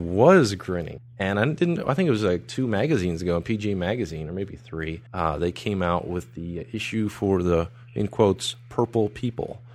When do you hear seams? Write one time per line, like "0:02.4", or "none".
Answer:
0:01.0
0:05.1